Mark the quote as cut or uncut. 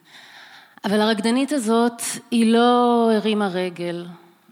uncut